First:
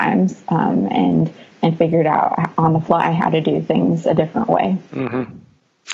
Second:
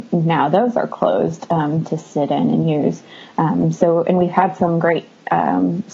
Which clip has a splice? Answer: first; 1 cut; at 4.9 s

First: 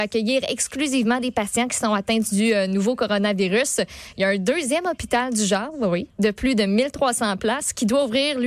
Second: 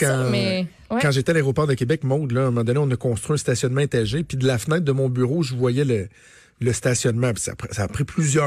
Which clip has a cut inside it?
first; 1 cut; at 6.1 s

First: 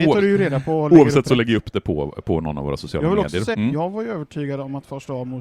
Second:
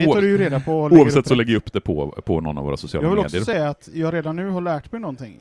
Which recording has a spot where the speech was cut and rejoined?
first; 1 cut; at 3.5 s

